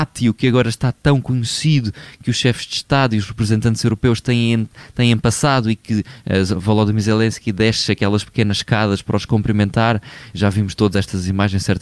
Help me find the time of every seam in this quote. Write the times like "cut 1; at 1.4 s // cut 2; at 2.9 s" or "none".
none